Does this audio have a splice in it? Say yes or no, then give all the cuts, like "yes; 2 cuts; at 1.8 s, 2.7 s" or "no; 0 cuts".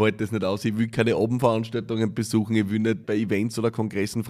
yes; 1 cut; at 3.0 s